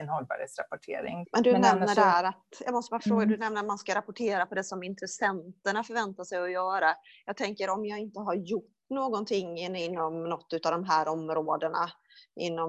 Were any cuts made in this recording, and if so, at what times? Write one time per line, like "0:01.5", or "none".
0:01.2